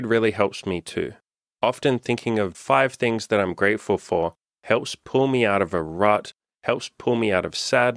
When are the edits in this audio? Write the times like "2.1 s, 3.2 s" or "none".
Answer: 2.5 s